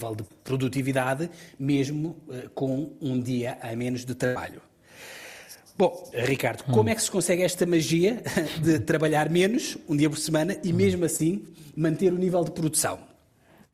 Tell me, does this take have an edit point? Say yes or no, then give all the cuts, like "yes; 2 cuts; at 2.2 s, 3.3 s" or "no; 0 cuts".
yes; 1 cut; at 6.1 s